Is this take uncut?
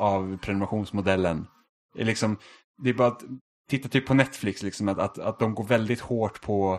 yes; 0 cuts

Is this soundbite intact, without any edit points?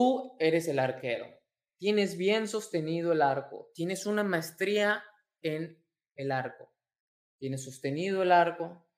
yes; 0 cuts

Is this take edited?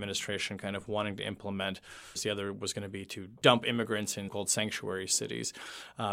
yes; 2 cuts; at 2.1 s, 4.3 s

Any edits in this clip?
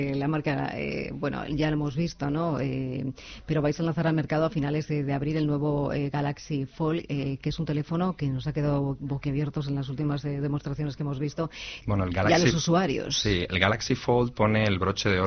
yes; 1 cut; at 11.8 s

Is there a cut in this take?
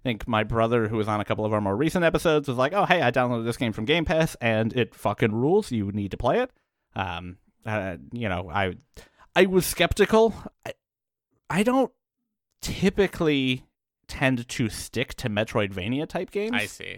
yes; 1 cut; at 10.5 s

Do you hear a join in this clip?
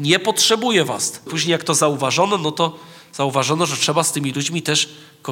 yes; 1 cut; at 1.3 s

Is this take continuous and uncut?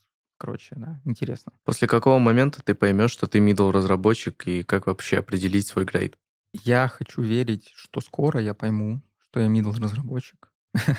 yes; 0 cuts

